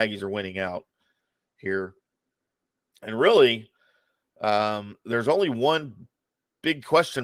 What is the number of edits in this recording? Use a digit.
0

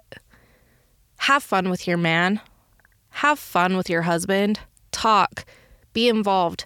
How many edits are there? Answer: 1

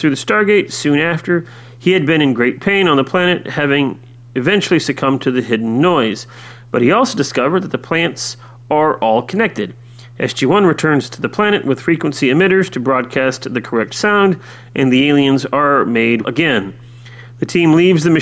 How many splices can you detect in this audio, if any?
1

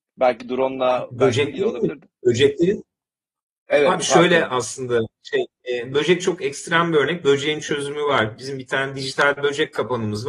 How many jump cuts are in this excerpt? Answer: 0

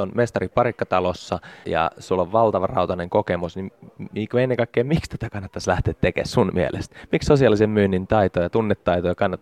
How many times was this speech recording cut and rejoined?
1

